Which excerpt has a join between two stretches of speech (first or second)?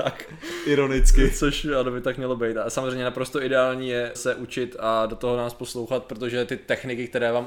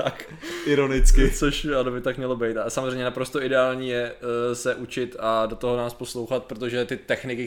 first